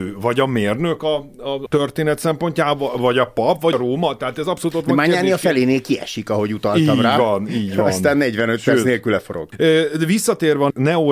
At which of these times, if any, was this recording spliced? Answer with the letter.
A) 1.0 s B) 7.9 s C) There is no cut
C